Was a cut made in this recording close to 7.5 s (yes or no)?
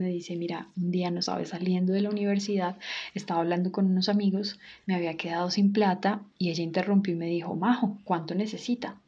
no